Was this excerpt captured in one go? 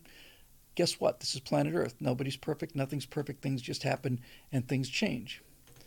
yes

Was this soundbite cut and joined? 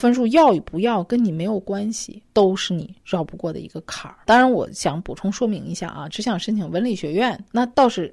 yes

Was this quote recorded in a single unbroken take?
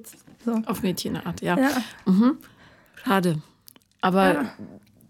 yes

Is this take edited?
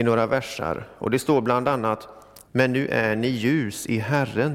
yes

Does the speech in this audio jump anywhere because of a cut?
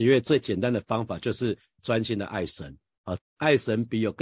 yes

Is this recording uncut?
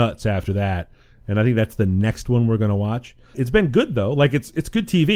no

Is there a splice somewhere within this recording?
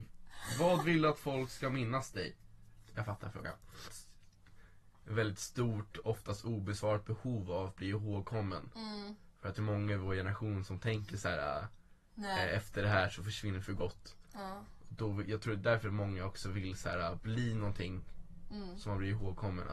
yes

